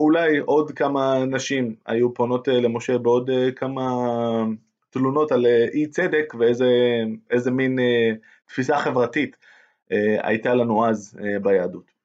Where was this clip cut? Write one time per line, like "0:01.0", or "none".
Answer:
none